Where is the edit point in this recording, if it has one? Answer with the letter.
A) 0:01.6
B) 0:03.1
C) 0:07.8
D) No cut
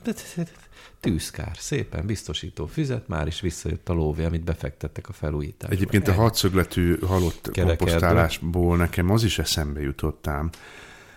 D